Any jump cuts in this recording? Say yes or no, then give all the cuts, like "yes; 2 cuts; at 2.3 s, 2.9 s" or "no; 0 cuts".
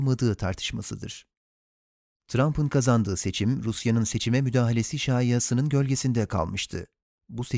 no; 0 cuts